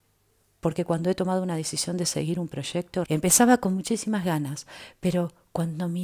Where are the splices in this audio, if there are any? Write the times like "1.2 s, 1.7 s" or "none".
3.1 s